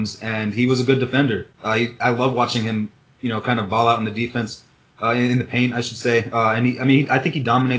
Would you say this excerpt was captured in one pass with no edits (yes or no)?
yes